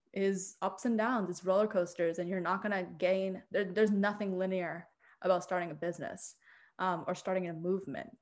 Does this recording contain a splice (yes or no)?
no